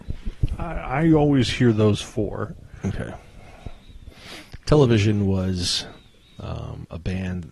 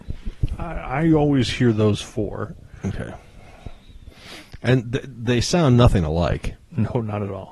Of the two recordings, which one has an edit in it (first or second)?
first